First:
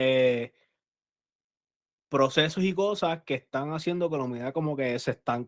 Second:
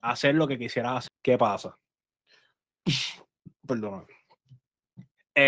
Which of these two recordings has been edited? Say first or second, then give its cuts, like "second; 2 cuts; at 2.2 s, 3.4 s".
second; 1 cut; at 1.1 s